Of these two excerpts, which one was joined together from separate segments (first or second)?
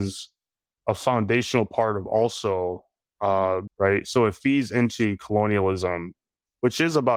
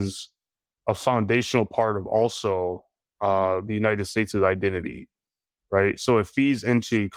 first